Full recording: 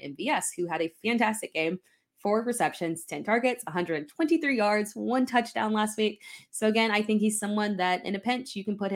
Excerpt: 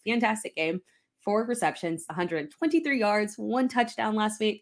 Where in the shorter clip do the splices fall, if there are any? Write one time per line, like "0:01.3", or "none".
0:02.1

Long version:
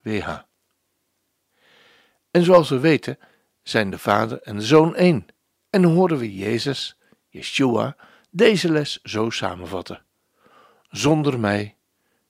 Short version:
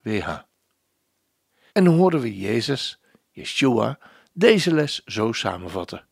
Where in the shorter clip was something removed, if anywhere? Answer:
0:01.7

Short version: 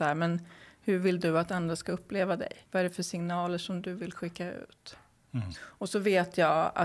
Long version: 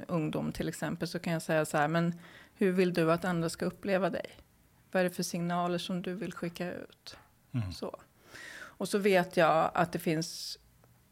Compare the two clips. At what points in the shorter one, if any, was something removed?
0:02.6
0:05.5

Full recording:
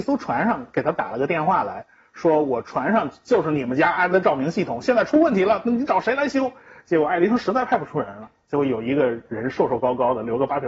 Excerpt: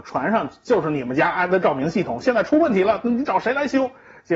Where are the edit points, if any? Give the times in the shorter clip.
none

